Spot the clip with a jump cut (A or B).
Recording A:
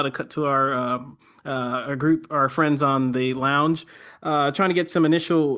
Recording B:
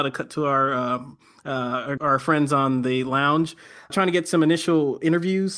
B